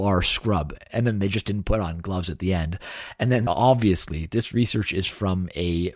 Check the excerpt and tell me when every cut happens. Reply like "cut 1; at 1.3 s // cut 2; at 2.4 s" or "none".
cut 1; at 3.5 s